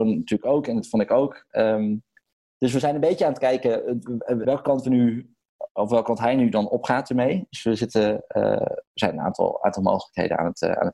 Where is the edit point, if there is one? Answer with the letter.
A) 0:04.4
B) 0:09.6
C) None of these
A